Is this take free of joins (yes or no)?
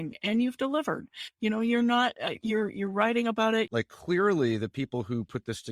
no